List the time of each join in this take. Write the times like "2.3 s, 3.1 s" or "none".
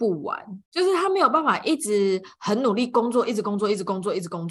3.3 s